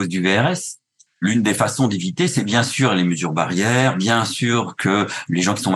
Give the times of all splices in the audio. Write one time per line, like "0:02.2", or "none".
0:01.1